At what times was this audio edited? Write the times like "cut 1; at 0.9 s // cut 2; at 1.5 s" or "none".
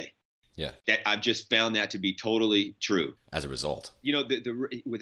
cut 1; at 3.2 s

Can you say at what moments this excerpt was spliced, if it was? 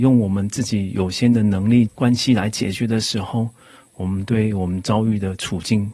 cut 1; at 1.9 s

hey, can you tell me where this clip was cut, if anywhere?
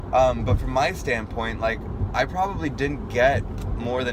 none

